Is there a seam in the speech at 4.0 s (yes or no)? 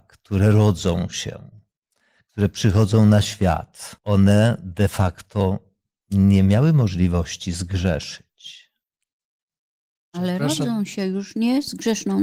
yes